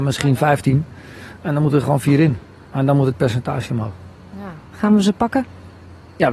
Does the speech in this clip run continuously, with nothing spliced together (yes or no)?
no